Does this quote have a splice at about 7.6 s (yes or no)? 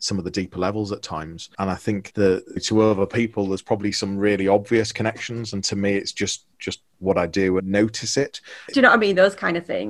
yes